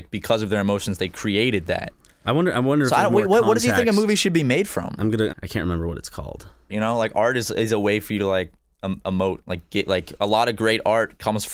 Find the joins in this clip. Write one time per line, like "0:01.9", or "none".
0:05.3
0:06.7